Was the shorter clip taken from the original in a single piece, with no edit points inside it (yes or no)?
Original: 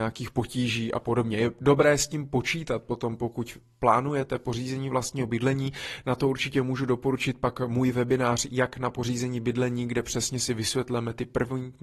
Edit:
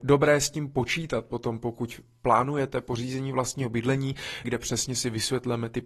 no